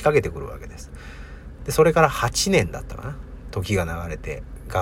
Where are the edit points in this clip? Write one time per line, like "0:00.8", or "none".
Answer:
0:01.6